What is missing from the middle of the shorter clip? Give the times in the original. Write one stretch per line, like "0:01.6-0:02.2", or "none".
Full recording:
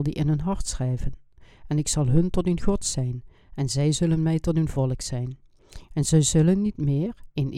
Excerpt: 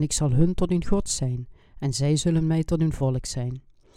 none